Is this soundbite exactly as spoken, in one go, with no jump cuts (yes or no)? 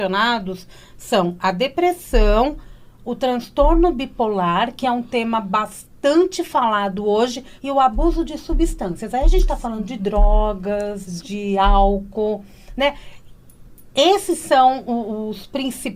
no